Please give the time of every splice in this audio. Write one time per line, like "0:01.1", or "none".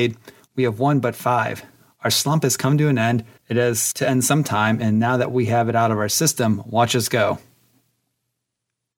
none